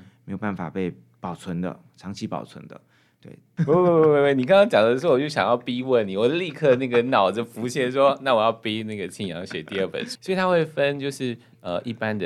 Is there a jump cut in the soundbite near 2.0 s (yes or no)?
no